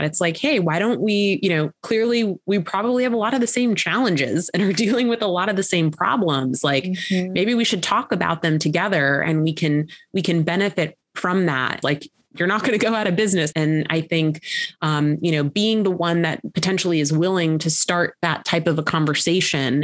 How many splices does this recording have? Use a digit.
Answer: 2